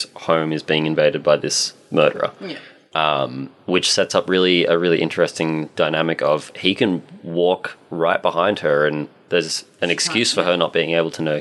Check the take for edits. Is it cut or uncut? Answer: uncut